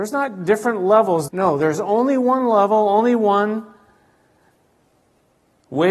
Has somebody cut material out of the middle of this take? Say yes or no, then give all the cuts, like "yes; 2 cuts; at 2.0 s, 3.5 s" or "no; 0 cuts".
yes; 1 cut; at 1.3 s